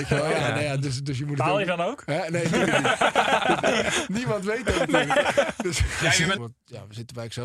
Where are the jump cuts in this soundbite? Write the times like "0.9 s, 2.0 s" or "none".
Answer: 6.4 s